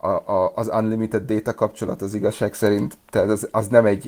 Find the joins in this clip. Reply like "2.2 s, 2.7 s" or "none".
3.0 s